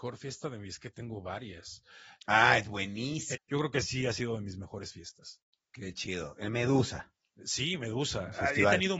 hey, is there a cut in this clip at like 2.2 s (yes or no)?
yes